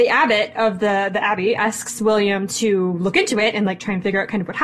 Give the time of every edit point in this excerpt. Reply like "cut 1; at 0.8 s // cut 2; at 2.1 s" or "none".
none